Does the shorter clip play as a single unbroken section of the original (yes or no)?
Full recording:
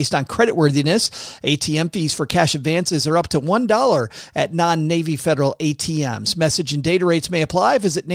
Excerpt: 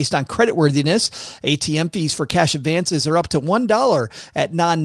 yes